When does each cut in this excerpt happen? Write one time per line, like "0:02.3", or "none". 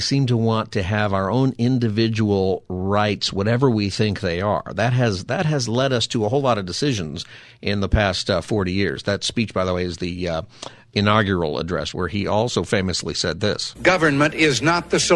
0:11.9
0:13.7